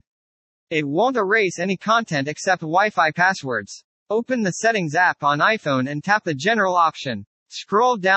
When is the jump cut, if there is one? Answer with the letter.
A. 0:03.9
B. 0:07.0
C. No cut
A